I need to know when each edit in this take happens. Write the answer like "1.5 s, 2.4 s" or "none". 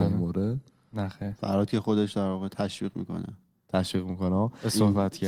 none

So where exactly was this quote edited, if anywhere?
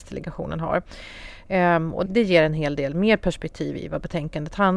2.1 s

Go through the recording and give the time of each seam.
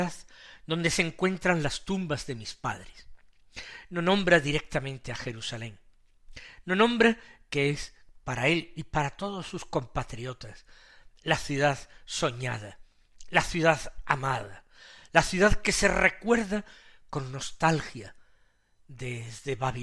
none

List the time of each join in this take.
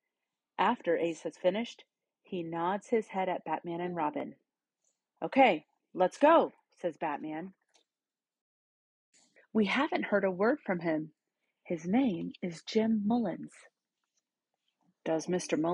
9.4 s

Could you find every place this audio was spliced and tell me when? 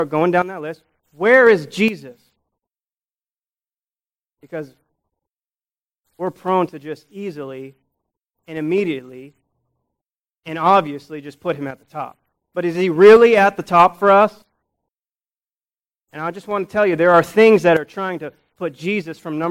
none

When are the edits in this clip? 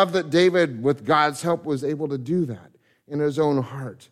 none

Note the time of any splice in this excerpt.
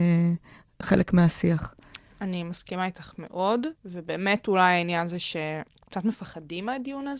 3.8 s

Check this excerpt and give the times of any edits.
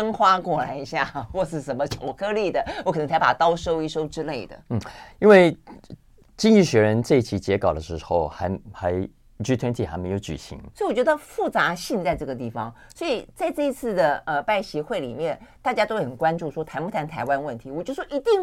10.7 s

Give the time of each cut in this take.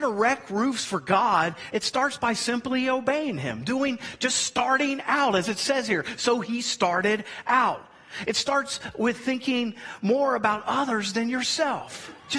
none

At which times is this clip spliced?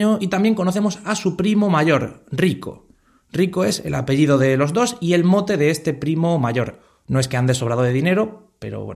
none

